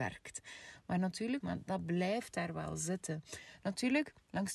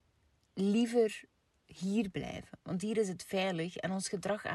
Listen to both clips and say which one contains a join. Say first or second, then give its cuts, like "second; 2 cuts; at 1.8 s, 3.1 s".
first; 1 cut; at 1.4 s